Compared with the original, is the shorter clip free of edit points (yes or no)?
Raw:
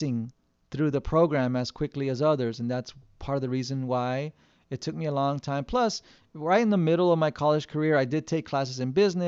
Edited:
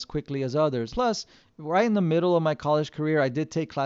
no